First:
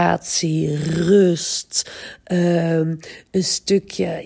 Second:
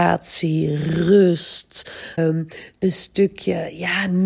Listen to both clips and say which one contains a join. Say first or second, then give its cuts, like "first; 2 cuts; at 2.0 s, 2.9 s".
second; 1 cut; at 2.2 s